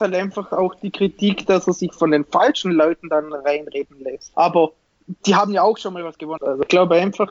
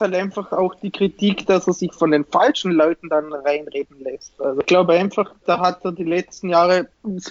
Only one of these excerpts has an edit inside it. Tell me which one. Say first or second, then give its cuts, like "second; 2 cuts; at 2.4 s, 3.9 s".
first; 2 cuts; at 4.3 s, 6.4 s